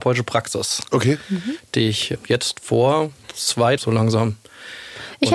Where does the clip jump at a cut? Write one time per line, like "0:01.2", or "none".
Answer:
0:03.8